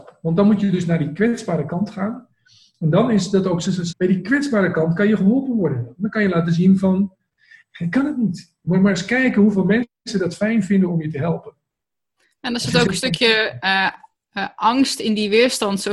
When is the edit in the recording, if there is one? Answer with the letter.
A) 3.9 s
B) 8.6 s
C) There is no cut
A